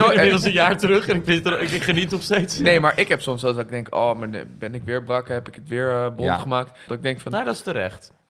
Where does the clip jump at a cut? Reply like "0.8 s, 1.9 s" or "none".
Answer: 6.9 s